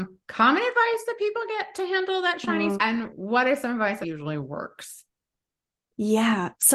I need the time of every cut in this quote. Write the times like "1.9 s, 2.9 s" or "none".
2.8 s, 4.0 s